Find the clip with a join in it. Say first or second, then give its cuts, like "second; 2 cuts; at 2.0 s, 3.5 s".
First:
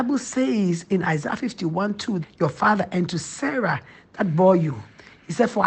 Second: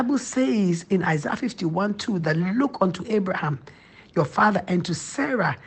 first; 1 cut; at 2.2 s